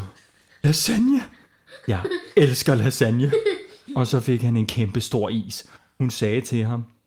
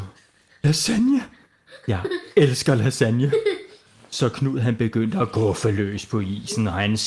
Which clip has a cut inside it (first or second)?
first